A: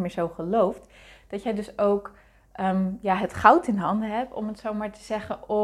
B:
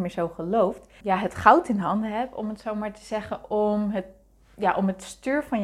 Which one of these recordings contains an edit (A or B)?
B